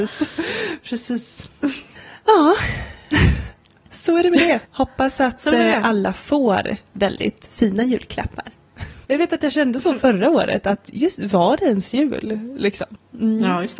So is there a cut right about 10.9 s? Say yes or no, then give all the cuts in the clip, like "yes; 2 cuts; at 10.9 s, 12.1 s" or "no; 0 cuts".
no; 2 cuts; at 4.6 s, 9.0 s